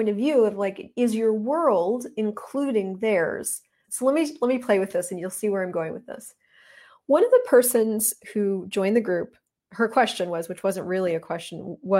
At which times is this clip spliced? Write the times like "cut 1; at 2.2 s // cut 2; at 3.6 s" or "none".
cut 1; at 3.8 s